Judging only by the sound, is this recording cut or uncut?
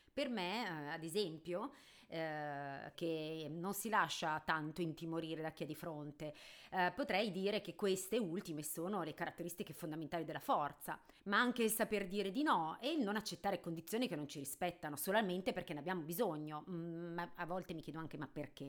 cut